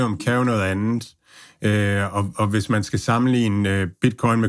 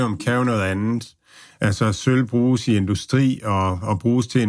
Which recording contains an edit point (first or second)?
second